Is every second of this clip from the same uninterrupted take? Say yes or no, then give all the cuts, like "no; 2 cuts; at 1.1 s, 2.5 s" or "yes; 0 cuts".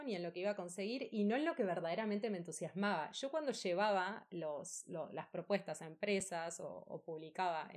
yes; 0 cuts